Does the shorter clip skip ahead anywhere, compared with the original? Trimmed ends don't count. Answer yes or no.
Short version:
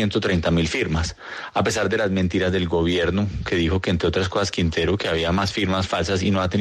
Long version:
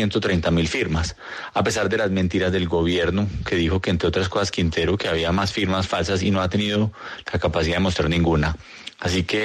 no